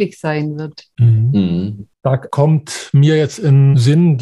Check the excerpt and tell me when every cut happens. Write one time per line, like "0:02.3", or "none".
0:01.9